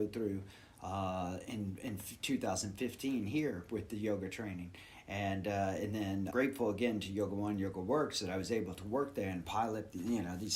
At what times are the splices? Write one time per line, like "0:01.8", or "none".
0:06.3